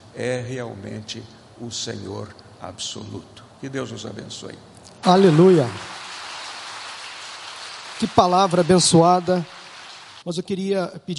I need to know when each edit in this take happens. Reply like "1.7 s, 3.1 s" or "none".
5.0 s, 10.2 s